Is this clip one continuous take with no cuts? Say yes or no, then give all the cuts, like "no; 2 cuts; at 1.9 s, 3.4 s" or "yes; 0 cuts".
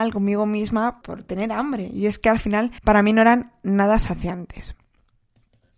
no; 2 cuts; at 1.0 s, 2.8 s